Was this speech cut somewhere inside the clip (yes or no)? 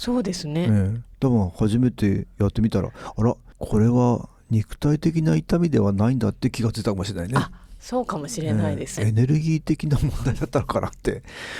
yes